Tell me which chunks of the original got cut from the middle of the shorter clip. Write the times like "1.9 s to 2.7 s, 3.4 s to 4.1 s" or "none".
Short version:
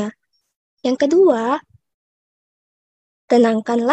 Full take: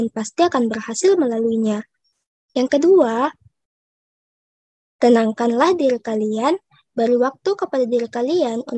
none